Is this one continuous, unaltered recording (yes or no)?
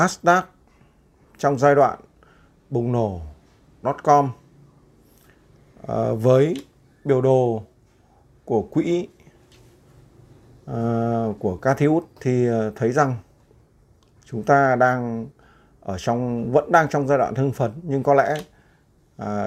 yes